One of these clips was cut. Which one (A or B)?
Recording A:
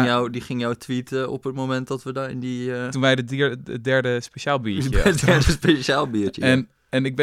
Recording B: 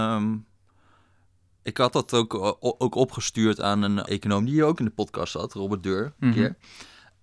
B